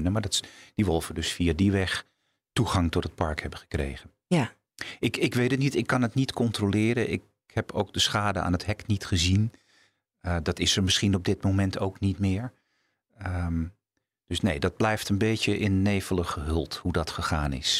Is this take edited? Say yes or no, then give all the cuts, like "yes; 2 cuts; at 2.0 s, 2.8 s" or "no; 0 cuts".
no; 0 cuts